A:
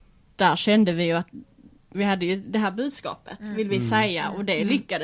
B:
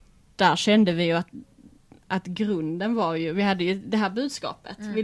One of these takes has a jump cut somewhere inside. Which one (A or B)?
A